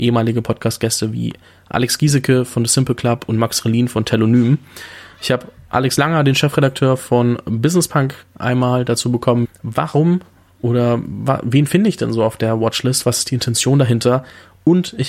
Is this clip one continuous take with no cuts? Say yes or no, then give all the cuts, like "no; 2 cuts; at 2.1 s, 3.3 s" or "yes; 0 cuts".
no; 1 cut; at 9.4 s